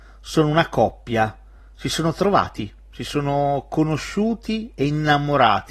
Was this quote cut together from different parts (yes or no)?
no